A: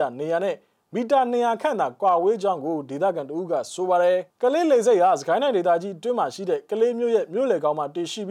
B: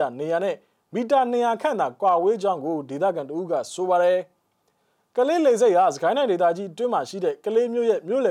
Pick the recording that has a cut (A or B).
A